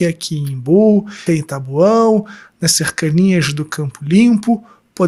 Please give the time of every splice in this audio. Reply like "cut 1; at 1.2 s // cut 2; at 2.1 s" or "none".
cut 1; at 1.3 s